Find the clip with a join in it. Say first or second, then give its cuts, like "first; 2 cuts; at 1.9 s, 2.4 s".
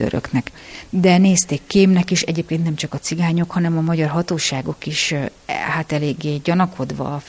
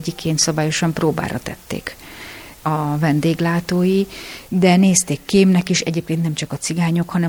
second; 1 cut; at 4.5 s